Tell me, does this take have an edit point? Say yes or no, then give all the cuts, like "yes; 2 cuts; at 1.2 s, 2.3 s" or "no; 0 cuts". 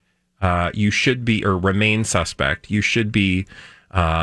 no; 0 cuts